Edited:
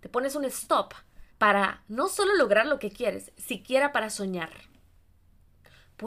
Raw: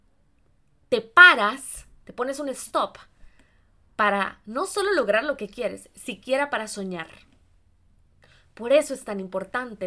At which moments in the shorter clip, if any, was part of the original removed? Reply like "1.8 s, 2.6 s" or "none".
1.3 s